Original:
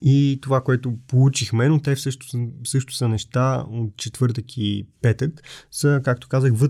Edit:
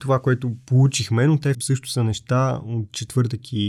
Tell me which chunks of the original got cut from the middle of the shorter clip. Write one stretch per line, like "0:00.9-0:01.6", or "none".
0:02.0-0:02.6